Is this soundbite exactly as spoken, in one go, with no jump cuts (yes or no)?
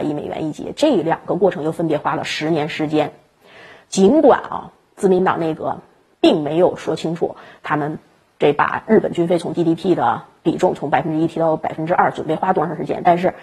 yes